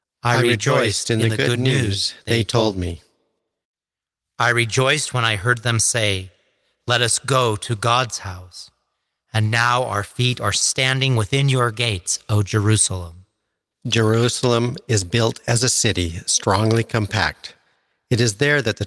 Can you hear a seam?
no; 0 cuts

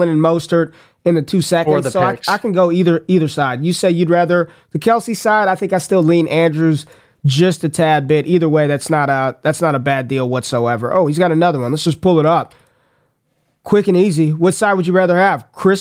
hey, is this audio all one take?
yes; 0 cuts

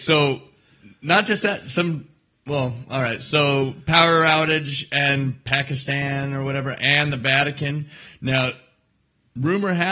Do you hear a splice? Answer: no; 0 cuts

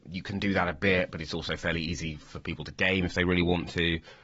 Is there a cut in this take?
no; 0 cuts

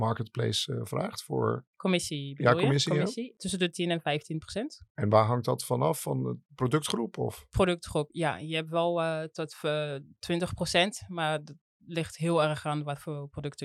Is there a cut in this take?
no; 0 cuts

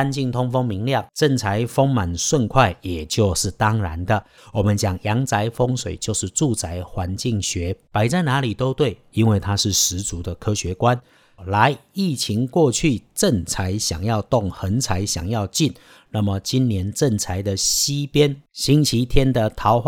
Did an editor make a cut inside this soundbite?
yes; 2 cuts; at 4.4 s, 11.4 s

